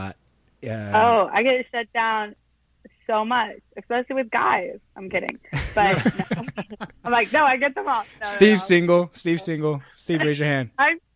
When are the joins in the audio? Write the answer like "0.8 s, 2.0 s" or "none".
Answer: none